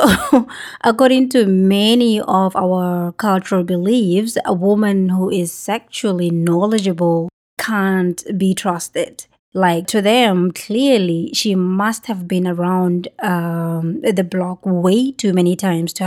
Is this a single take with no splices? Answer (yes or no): no